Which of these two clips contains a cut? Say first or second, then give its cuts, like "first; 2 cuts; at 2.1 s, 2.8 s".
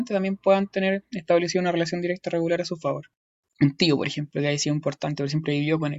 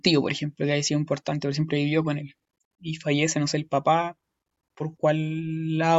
first; 1 cut; at 3.4 s